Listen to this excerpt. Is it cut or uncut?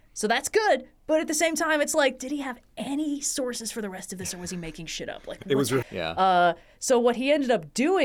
cut